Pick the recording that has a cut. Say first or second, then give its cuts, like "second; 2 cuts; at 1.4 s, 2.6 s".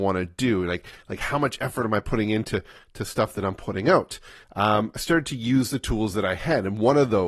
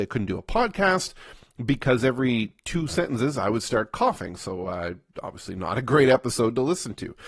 first; 1 cut; at 4.4 s